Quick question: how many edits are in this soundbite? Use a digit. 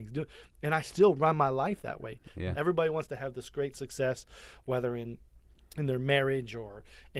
1